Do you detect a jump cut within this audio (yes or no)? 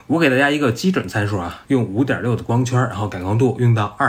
yes